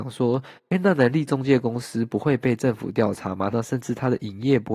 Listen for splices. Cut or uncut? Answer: cut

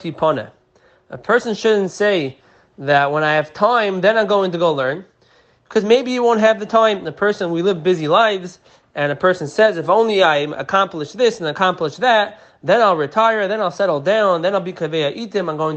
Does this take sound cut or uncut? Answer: uncut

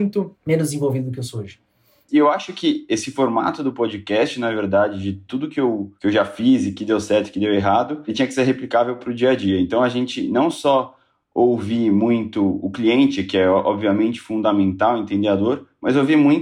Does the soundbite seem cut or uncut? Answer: cut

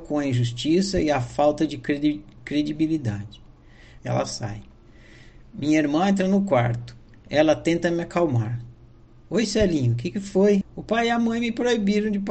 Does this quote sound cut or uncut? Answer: cut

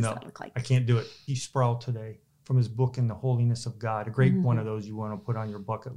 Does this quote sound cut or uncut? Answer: cut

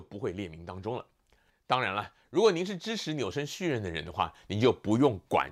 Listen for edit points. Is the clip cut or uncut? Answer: cut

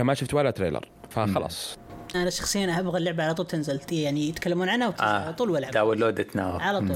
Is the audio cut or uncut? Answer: cut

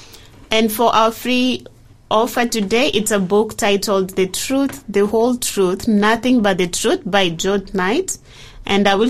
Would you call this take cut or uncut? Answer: uncut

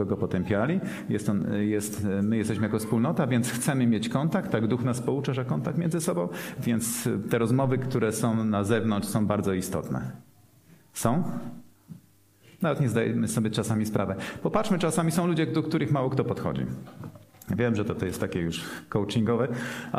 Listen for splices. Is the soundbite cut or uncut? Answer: uncut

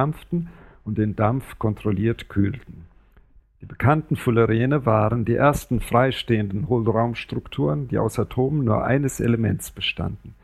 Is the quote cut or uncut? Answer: cut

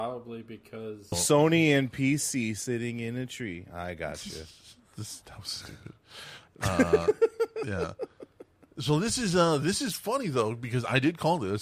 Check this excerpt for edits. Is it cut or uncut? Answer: cut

